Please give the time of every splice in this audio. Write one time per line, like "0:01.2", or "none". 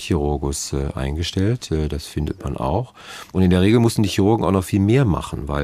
0:03.3